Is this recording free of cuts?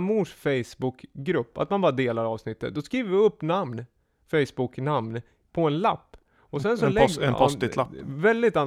yes; 0 cuts

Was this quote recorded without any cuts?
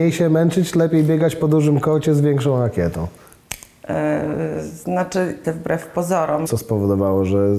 no; 2 cuts; at 5.4 s, 6.5 s

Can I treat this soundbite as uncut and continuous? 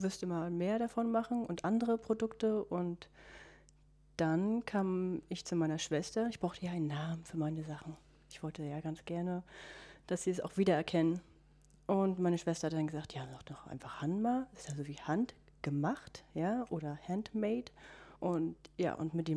no; 1 cut; at 18.2 s

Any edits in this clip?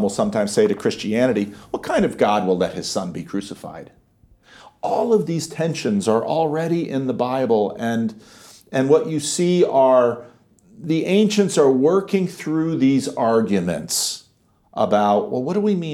no; 0 cuts

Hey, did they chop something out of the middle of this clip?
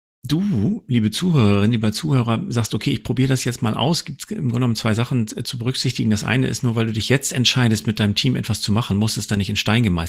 no; 0 cuts

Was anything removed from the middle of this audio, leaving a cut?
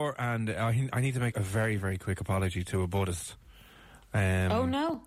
yes; 1 cut; at 1.3 s

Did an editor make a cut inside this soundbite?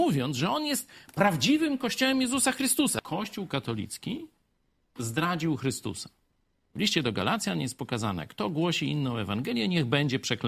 no; 0 cuts

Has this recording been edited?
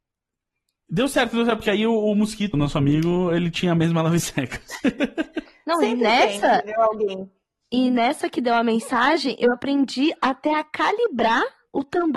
yes; 1 cut; at 2.5 s

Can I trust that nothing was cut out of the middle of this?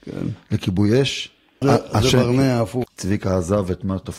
no; 2 cuts; at 1.6 s, 2.8 s

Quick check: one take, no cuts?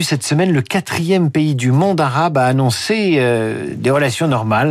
yes; 0 cuts

